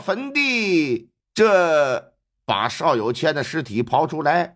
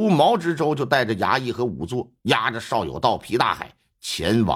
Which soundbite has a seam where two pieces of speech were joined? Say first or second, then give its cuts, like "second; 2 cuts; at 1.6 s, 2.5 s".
first; 1 cut; at 1.2 s